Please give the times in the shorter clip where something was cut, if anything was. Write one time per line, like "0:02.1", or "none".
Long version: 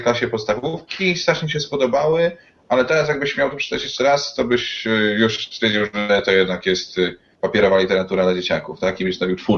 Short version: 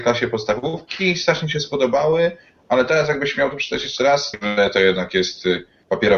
0:04.3